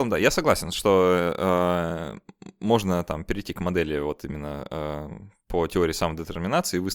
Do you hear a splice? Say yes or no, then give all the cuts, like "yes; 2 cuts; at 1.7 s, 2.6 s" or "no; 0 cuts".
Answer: no; 0 cuts